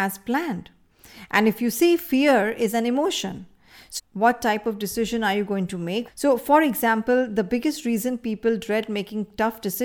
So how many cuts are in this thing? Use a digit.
2